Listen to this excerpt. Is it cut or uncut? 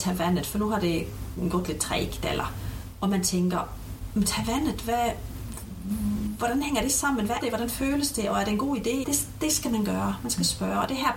cut